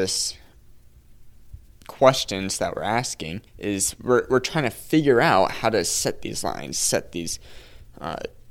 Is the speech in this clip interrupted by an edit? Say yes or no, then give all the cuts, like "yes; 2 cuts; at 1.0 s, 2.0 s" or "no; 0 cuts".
yes; 1 cut; at 3.5 s